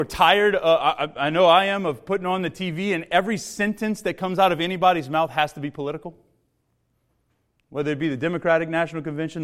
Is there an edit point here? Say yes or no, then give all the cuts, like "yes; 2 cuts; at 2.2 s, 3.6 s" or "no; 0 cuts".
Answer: no; 0 cuts